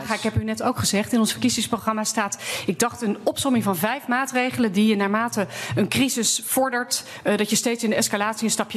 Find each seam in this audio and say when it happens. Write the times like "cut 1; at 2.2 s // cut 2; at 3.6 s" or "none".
none